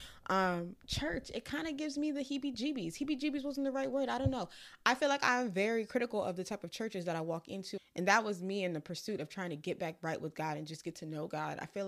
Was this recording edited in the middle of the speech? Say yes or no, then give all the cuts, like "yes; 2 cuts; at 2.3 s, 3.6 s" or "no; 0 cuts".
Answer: yes; 1 cut; at 7.8 s